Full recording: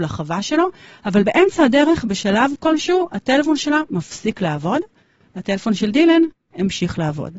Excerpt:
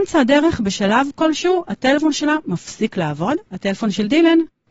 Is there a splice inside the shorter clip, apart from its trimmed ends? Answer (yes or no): yes